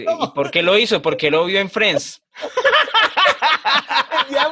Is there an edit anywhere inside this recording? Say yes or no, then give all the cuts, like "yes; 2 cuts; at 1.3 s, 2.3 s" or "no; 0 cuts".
no; 0 cuts